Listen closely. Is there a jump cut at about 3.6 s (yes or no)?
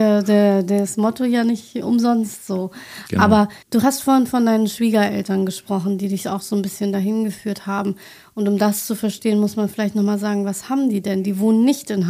yes